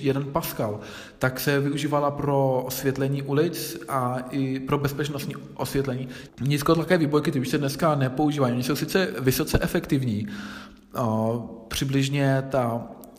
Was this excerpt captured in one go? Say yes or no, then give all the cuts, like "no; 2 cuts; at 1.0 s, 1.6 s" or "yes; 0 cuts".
no; 1 cut; at 6.3 s